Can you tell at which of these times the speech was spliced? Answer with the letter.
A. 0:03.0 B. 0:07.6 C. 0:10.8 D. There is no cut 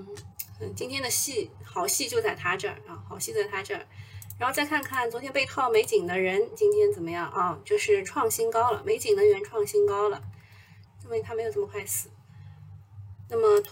C